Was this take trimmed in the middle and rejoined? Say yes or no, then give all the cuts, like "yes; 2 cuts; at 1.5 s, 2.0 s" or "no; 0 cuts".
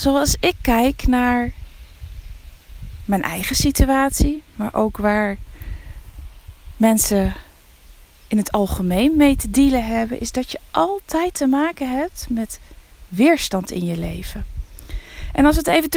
no; 0 cuts